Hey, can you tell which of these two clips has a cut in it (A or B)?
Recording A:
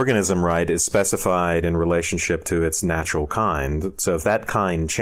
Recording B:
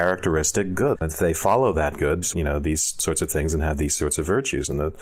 B